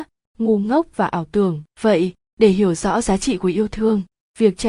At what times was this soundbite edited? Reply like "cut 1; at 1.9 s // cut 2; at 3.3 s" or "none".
cut 1; at 1.7 s